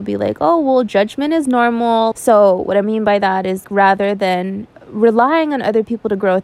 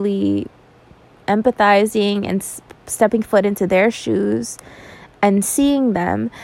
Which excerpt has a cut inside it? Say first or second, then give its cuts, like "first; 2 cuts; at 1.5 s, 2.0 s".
first; 3 cuts; at 2.1 s, 3.6 s, 4.7 s